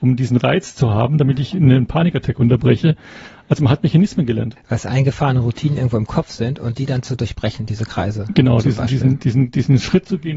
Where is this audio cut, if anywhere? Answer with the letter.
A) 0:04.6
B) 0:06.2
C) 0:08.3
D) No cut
A